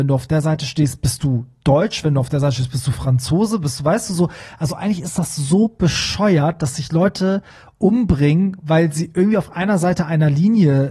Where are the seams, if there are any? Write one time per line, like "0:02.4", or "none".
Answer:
none

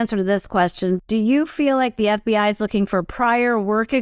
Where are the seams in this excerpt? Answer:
0:01.0

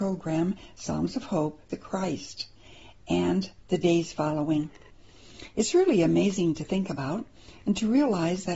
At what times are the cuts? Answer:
0:01.7

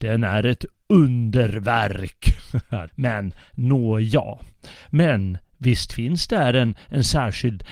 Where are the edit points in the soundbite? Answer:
0:02.9
0:04.7

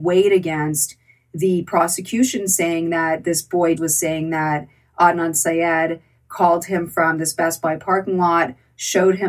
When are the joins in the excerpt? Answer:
0:03.8

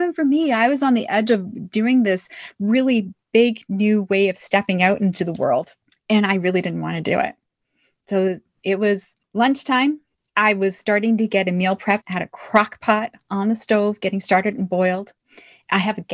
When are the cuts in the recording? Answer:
0:12.0

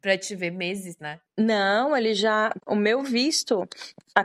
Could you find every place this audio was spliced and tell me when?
0:01.0
0:02.6

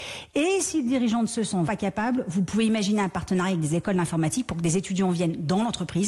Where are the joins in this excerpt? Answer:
0:01.7

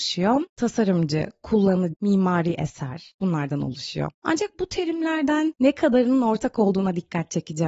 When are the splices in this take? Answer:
0:01.9
0:04.2

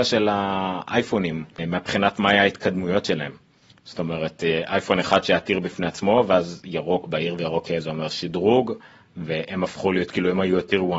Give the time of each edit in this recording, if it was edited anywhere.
0:01.6

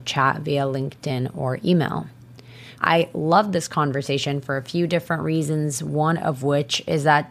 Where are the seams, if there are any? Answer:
0:02.7

